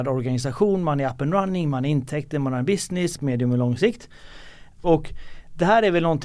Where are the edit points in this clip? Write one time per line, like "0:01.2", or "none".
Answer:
0:03.2
0:04.8